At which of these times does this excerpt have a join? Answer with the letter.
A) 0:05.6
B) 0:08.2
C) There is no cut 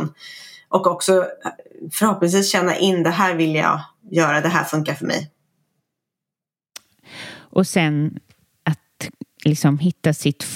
C